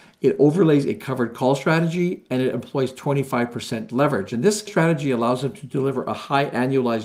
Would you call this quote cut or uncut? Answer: uncut